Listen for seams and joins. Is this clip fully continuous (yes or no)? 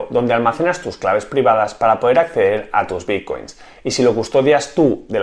yes